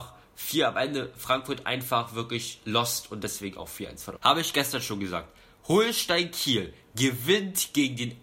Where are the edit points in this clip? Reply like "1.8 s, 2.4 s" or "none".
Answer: 4.2 s